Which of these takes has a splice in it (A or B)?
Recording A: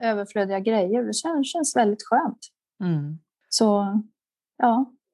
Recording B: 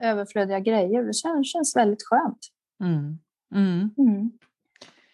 A